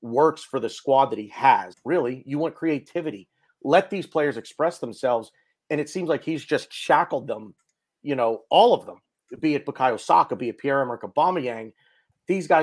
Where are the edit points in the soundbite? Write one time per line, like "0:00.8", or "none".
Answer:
0:01.7